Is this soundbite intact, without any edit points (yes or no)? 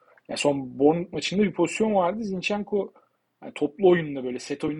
yes